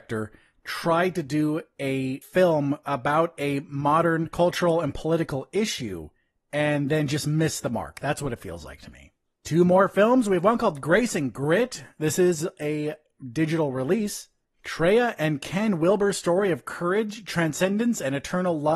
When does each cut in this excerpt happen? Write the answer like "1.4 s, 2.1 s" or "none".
none